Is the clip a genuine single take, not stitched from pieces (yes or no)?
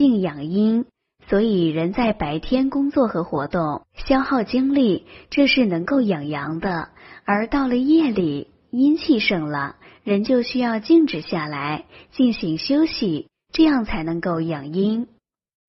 yes